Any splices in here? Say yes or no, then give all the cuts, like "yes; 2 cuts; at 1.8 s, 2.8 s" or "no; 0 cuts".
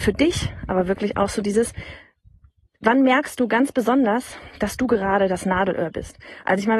no; 0 cuts